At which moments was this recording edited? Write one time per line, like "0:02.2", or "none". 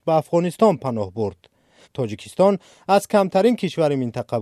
0:01.8